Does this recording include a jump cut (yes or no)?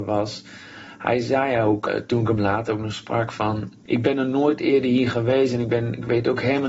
yes